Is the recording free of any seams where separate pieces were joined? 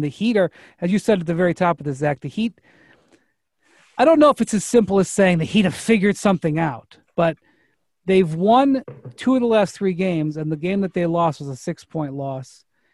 yes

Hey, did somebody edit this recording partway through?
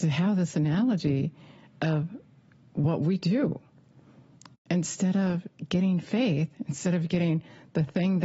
no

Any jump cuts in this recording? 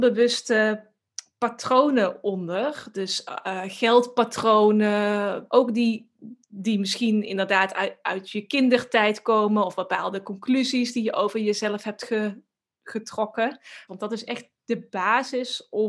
yes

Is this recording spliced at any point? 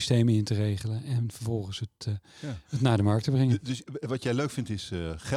no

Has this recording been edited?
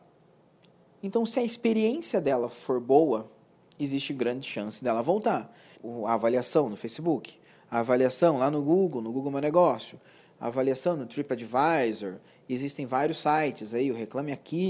yes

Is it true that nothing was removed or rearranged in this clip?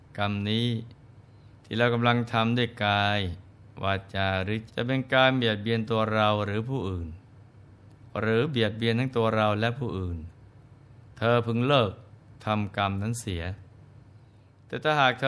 no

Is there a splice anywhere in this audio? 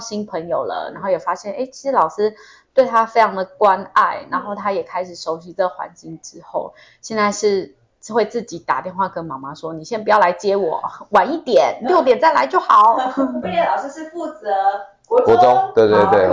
yes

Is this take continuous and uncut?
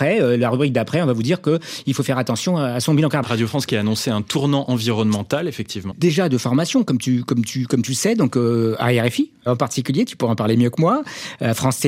no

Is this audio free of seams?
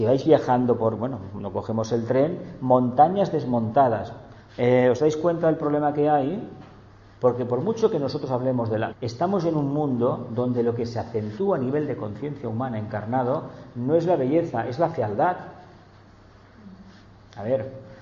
no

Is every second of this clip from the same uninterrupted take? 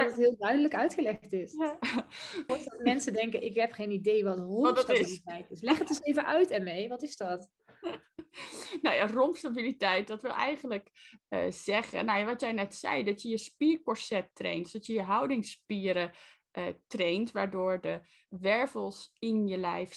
no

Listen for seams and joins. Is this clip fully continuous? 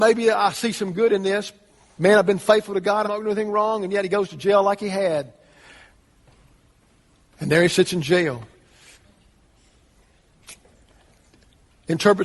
no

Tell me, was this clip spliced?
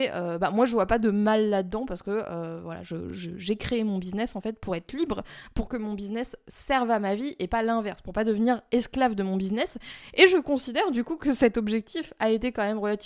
no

